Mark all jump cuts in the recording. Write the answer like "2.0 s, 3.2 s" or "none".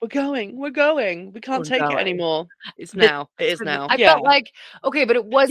2.8 s, 3.9 s